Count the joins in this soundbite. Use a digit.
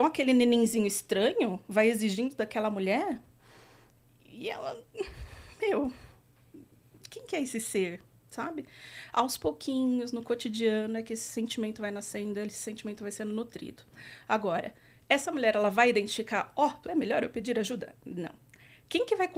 1